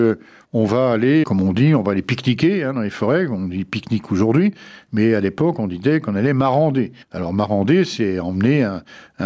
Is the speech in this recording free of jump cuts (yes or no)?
no